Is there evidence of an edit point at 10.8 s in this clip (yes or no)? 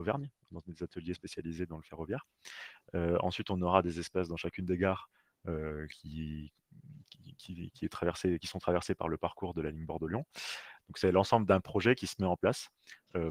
yes